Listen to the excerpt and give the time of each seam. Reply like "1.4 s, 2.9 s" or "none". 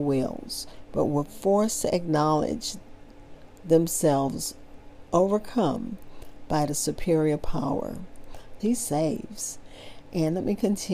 8.6 s